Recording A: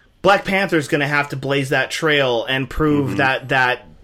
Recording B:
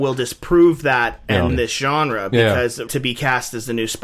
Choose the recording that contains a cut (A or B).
B